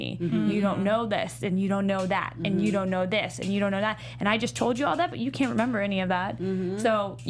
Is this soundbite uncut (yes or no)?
yes